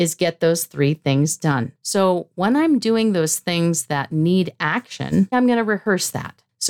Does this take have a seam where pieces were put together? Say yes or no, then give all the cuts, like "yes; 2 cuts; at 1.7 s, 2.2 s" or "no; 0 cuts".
yes; 2 cuts; at 1.8 s, 5.3 s